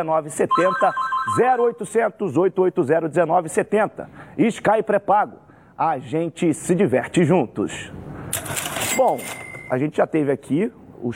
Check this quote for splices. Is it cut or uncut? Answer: uncut